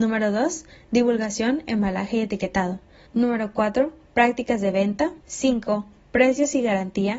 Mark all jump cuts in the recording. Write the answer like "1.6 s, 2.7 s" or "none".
3.1 s, 5.2 s